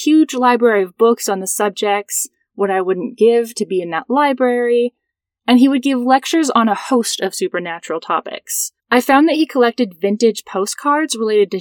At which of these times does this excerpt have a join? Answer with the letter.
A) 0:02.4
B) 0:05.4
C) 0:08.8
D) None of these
C